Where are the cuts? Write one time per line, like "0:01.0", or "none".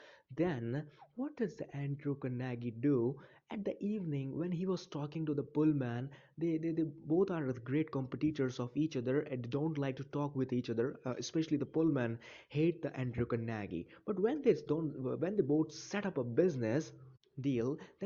none